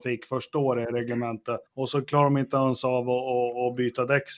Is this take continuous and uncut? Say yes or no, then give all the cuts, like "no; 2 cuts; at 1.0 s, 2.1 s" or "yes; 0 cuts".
no; 1 cut; at 1.7 s